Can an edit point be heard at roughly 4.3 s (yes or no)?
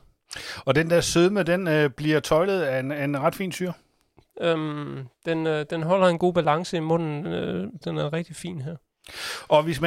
yes